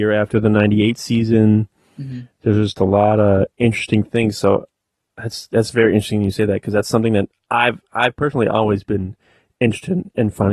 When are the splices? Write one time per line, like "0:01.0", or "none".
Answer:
none

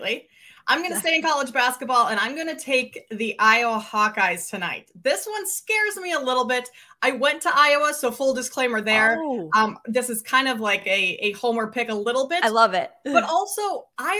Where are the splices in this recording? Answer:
none

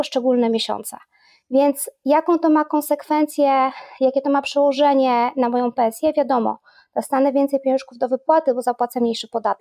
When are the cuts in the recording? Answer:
none

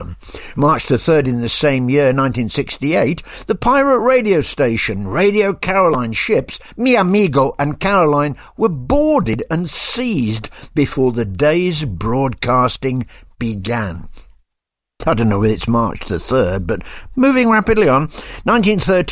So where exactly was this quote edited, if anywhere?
0:15.0

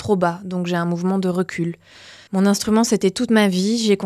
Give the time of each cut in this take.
0:02.3

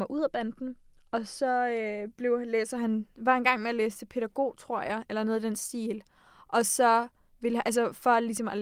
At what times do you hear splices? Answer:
none

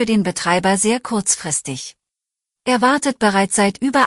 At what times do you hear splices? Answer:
0:02.6

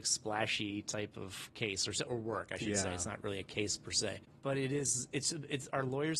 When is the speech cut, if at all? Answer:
0:02.1

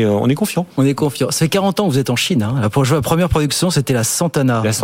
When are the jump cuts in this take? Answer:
none

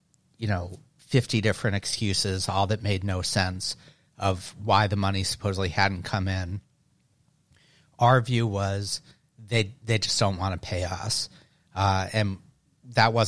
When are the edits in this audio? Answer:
none

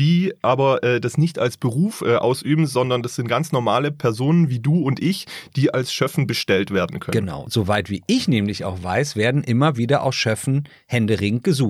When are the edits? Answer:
none

